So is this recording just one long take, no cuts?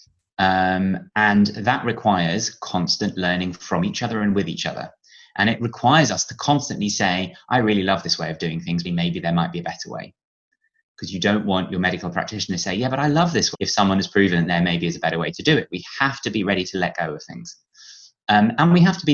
no; 2 cuts; at 8.8 s, 13.5 s

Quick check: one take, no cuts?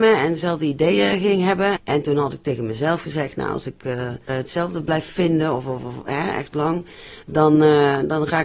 no; 2 cuts; at 1.8 s, 4.3 s

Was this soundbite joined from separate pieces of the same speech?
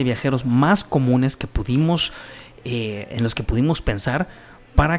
no; 0 cuts

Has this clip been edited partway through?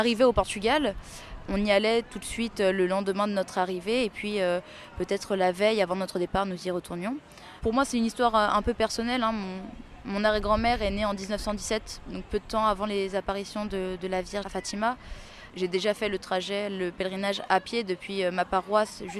yes; 1 cut; at 14.4 s

